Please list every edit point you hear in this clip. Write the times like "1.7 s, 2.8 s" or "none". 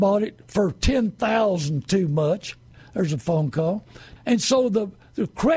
4.2 s